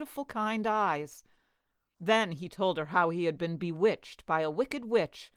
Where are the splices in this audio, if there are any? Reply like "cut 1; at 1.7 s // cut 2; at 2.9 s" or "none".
cut 1; at 1.9 s

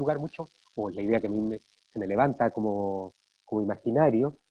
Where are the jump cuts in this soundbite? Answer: none

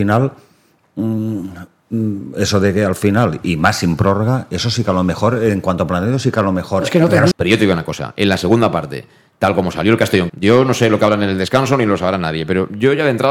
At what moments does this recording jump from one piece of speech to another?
cut 1; at 7.3 s // cut 2; at 10.3 s

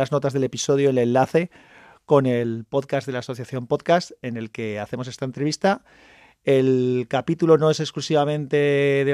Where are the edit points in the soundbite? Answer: none

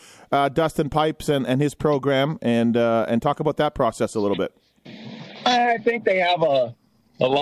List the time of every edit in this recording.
none

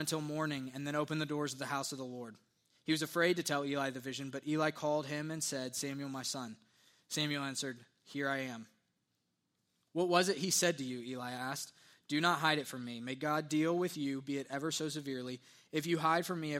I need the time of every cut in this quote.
none

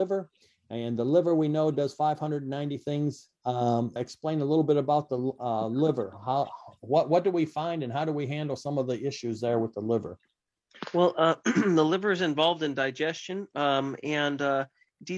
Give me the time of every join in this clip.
cut 1; at 4.0 s

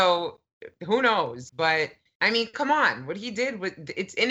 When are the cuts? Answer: cut 1; at 1.5 s

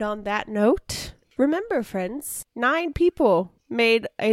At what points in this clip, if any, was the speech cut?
cut 1; at 2.5 s

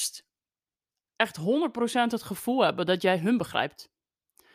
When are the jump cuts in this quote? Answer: none

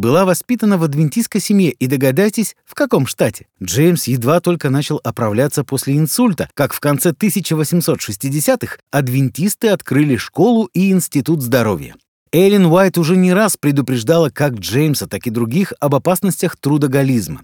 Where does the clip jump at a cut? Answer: cut 1; at 3.5 s

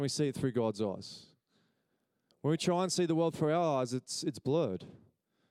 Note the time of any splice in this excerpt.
none

